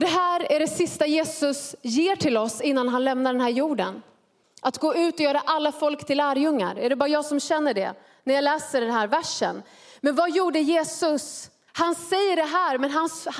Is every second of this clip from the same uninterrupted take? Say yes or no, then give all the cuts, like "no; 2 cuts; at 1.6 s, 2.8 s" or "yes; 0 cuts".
no; 2 cuts; at 4.4 s, 11.7 s